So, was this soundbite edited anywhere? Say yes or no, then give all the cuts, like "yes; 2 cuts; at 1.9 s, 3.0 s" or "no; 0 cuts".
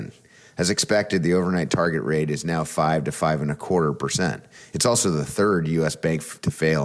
yes; 1 cut; at 4.7 s